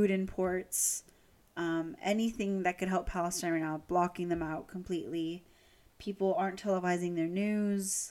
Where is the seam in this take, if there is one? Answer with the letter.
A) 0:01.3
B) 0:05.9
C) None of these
C